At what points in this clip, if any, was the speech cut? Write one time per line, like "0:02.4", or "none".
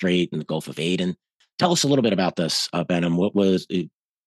none